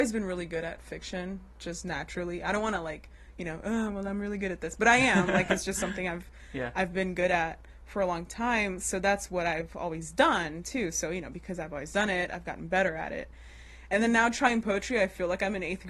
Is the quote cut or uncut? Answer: uncut